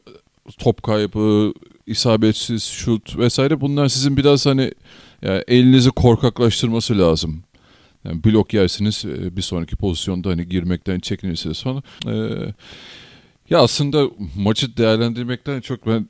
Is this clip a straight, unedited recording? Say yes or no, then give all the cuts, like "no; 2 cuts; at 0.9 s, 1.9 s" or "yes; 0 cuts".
no; 1 cut; at 12.0 s